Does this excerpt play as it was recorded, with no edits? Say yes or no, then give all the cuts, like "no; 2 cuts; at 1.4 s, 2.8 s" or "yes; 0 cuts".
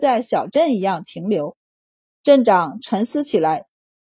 yes; 0 cuts